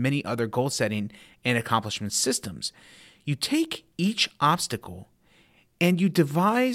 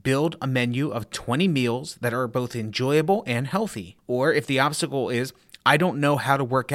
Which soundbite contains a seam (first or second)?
second